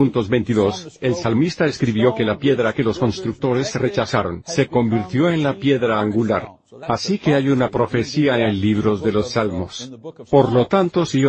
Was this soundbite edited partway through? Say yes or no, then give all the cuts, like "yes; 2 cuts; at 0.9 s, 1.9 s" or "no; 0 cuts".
no; 0 cuts